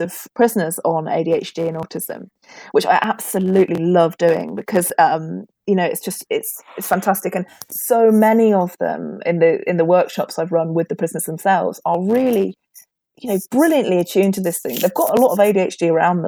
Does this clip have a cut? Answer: no; 0 cuts

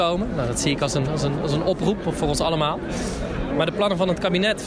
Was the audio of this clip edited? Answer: yes; 1 cut; at 3.5 s

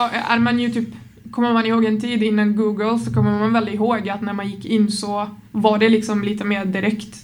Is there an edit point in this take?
yes; 1 cut; at 5.5 s

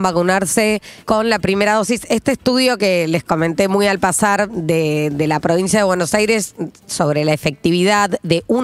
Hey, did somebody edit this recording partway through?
yes; 1 cut; at 1.0 s

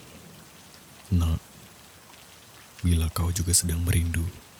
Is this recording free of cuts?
yes; 0 cuts

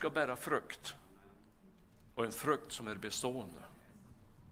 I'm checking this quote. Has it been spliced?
no; 0 cuts

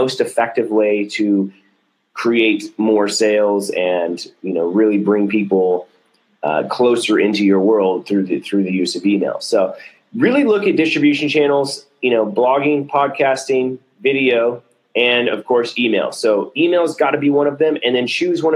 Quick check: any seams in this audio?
no; 0 cuts

